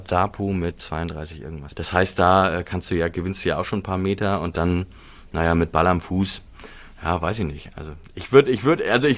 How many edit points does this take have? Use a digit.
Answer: 1